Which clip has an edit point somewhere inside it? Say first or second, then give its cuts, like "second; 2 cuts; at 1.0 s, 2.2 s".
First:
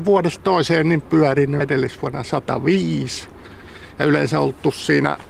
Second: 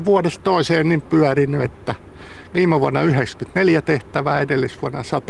first; 1 cut; at 1.6 s